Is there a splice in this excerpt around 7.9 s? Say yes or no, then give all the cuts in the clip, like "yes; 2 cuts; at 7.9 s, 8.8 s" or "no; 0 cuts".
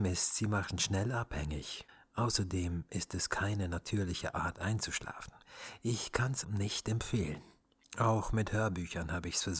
yes; 2 cuts; at 6.4 s, 7.9 s